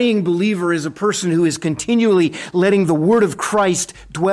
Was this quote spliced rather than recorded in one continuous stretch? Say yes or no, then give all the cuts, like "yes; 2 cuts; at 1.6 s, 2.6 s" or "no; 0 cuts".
no; 0 cuts